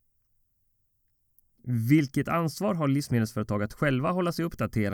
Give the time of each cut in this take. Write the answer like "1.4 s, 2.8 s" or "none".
1.5 s